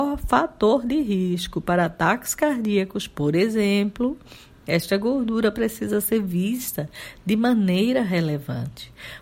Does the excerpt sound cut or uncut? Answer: uncut